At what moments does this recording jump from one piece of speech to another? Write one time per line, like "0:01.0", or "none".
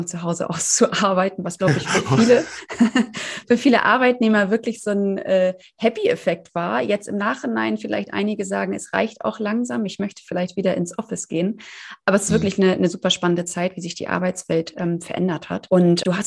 none